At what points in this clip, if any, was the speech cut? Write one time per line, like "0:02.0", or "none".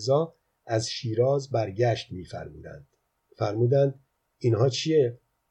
none